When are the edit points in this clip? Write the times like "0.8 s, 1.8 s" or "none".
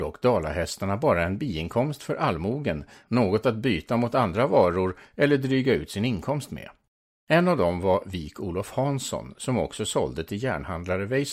7.2 s